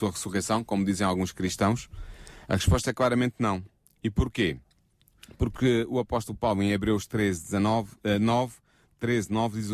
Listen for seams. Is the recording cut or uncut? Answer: uncut